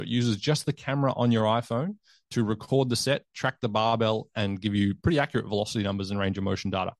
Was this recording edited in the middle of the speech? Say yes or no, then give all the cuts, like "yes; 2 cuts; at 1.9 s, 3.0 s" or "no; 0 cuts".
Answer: no; 0 cuts